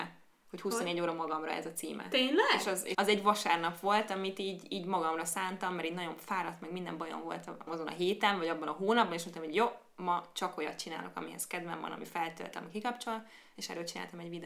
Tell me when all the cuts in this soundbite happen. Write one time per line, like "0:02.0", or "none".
0:02.9
0:07.7